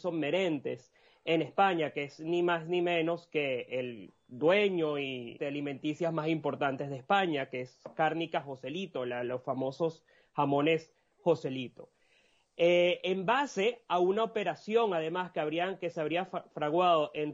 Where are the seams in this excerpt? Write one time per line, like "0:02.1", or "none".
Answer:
0:05.4

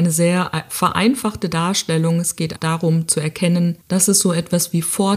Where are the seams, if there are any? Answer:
0:02.6
0:03.8

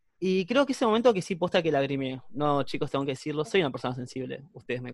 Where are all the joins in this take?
none

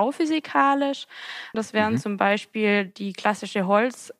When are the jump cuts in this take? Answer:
0:01.5

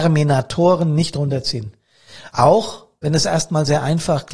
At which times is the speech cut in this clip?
none

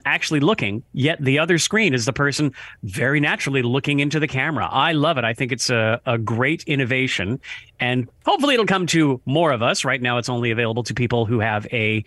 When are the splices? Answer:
none

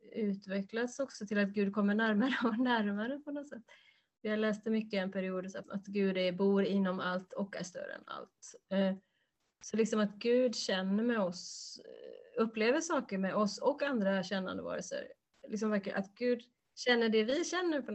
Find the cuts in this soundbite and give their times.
0:05.6

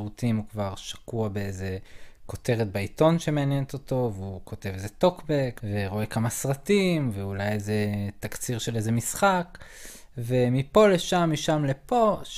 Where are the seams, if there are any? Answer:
0:05.6

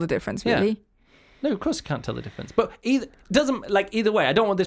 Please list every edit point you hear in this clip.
none

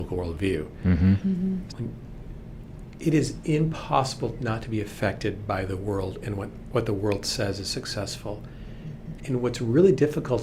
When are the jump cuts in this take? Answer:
0:01.7
0:09.2

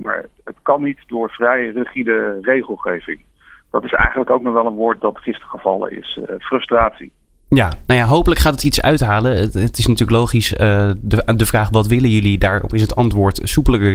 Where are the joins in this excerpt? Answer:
none

